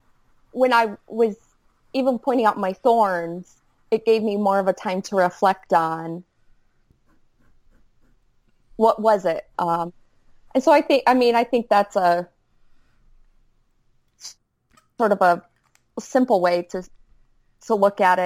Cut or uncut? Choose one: cut